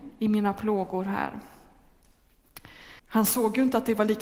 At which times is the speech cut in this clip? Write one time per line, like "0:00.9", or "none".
0:03.0